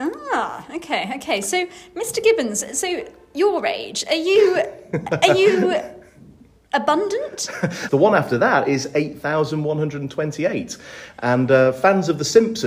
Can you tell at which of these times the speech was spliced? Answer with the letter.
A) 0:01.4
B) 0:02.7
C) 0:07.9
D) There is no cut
C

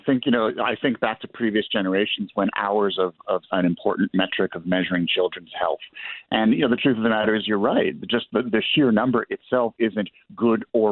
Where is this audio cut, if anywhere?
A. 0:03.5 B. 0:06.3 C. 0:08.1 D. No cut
A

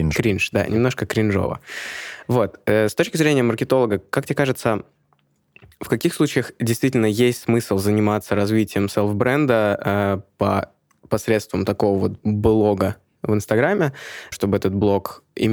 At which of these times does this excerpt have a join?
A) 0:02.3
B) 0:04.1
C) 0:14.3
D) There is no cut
C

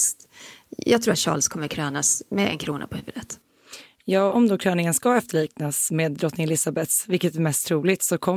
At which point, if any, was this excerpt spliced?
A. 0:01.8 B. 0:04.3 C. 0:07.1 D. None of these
B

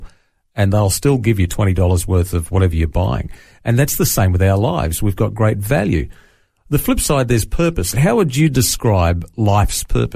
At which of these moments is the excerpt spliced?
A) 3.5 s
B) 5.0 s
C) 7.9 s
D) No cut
C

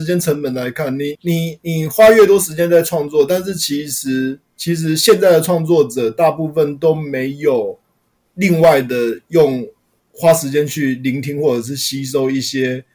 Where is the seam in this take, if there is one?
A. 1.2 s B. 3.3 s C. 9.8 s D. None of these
A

